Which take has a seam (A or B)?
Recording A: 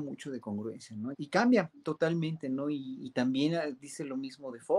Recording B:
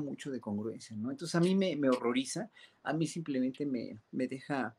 A